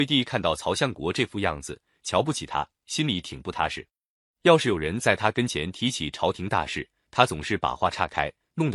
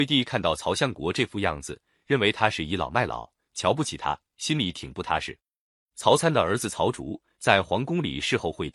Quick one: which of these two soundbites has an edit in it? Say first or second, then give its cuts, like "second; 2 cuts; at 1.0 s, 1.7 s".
first; 2 cuts; at 2.0 s, 4.2 s